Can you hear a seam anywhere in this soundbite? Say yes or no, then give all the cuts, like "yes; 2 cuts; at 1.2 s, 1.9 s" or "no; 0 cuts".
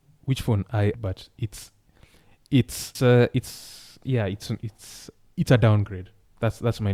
yes; 2 cuts; at 0.9 s, 2.9 s